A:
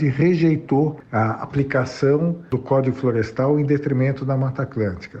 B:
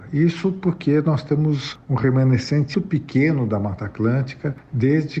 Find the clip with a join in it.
B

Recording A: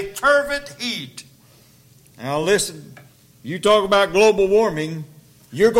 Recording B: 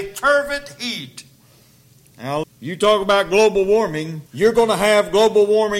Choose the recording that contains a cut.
B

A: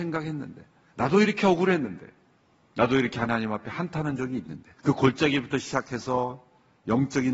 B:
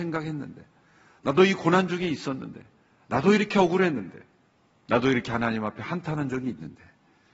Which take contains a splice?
A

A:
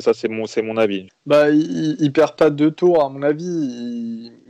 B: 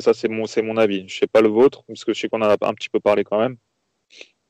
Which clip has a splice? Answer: A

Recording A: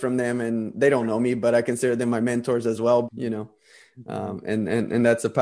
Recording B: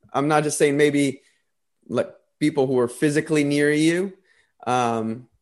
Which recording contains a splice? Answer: A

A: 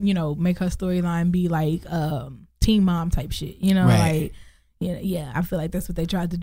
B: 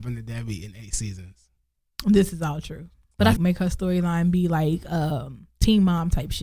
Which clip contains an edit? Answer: B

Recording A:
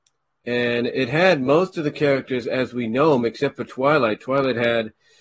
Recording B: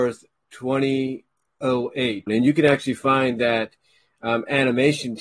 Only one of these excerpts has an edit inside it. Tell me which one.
B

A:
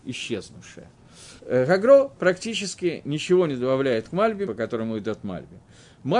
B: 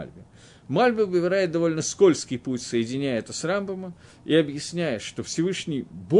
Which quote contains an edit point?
A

